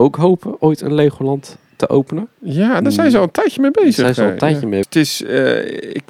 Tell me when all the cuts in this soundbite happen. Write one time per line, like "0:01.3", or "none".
0:04.8